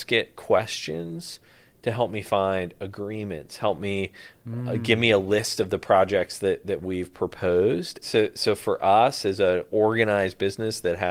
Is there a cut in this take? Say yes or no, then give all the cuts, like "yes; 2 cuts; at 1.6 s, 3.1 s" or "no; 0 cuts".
yes; 1 cut; at 8.0 s